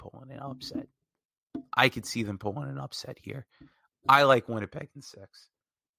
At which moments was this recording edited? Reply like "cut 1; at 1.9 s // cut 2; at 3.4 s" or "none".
none